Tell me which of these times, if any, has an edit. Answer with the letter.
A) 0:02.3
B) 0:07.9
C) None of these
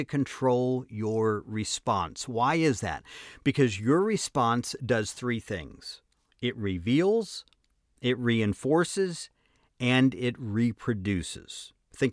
C